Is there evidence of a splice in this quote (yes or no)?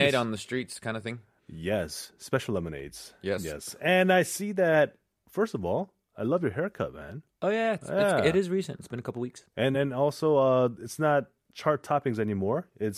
no